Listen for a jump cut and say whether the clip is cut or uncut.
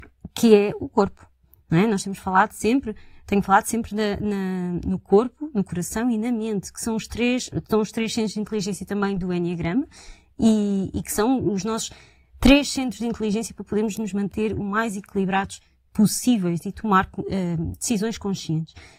uncut